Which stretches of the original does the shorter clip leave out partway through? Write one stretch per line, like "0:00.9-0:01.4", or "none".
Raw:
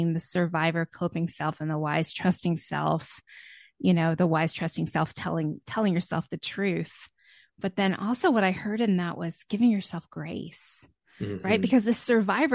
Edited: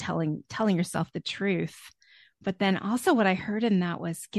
none